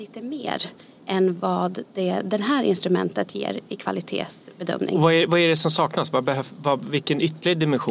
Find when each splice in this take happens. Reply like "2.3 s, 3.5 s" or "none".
none